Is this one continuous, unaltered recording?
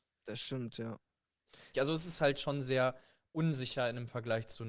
no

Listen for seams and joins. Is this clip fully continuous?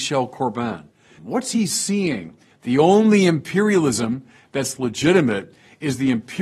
no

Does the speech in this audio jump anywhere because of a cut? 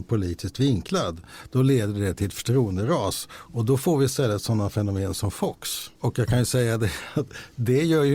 yes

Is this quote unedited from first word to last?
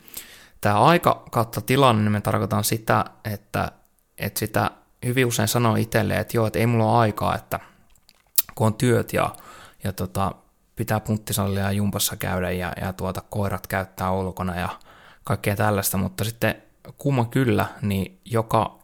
yes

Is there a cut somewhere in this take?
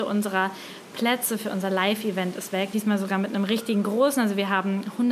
yes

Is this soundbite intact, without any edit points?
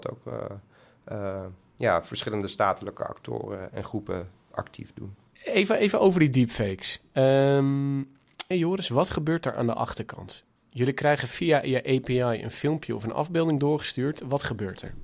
no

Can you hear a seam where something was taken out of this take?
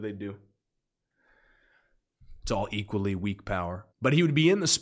yes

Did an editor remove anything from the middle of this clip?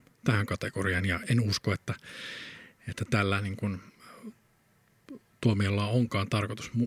yes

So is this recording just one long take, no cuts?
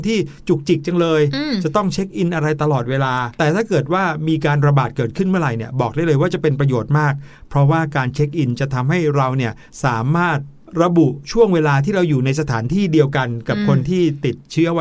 no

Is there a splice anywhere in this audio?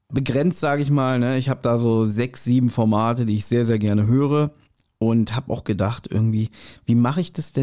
no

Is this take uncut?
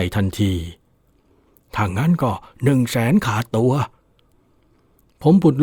yes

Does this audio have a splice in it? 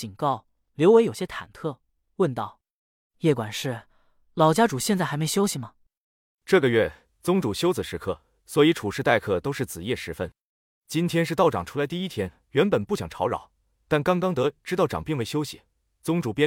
no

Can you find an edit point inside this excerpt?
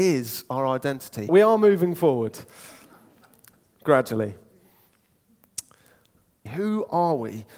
yes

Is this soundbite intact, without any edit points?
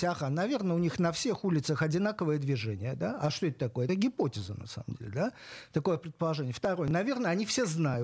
yes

